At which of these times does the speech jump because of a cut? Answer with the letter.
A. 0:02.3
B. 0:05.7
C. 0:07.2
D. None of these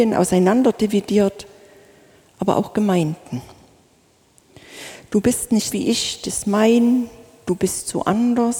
B